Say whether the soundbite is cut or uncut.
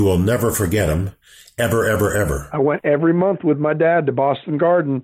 uncut